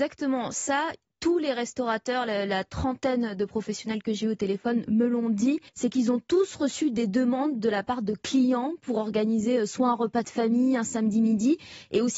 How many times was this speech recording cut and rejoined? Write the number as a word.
one